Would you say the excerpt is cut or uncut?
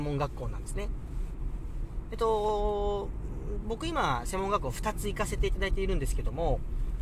uncut